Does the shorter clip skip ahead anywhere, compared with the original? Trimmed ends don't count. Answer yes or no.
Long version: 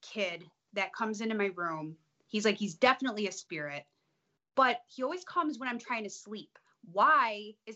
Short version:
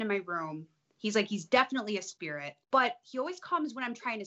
yes